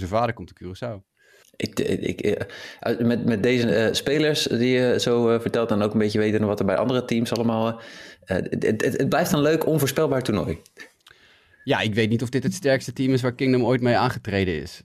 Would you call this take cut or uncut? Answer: cut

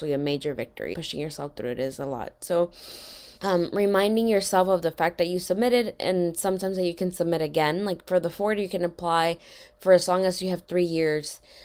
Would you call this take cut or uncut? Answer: cut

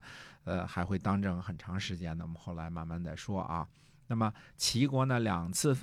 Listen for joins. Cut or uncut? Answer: uncut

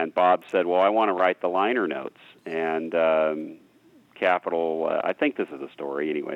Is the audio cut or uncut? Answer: uncut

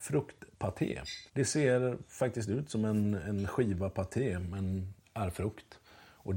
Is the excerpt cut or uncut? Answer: cut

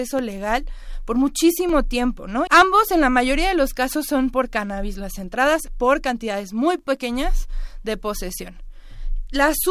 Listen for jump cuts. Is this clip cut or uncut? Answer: cut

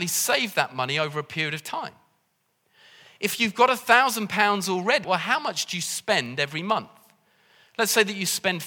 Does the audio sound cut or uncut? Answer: cut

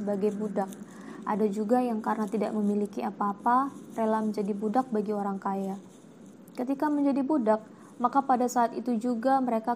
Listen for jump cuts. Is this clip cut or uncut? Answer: uncut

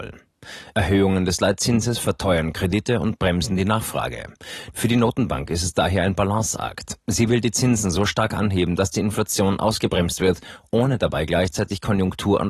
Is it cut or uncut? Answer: cut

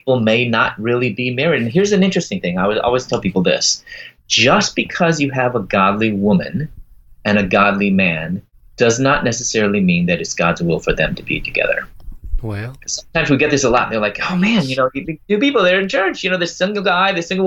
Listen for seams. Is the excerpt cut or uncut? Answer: uncut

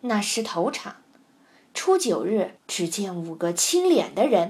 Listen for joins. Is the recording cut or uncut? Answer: cut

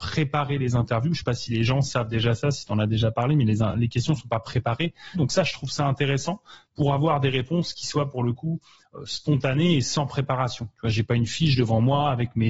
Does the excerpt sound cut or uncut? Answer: cut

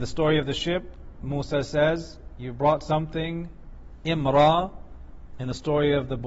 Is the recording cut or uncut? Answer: uncut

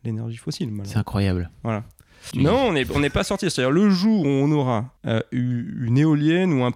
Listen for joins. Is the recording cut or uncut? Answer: cut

